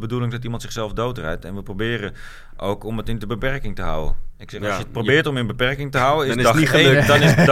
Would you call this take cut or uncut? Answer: uncut